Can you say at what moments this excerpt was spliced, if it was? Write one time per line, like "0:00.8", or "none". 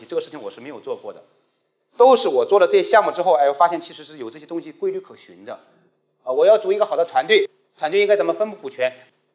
none